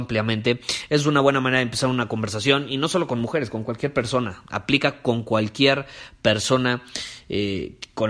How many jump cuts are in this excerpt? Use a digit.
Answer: 0